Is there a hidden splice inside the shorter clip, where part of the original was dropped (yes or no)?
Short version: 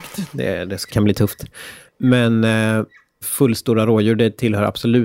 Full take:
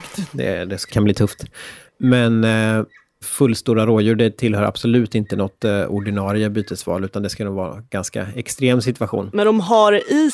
no